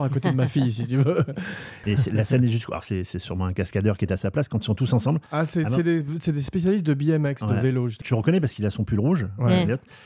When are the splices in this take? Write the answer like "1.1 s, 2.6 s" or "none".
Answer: 1.8 s, 8.0 s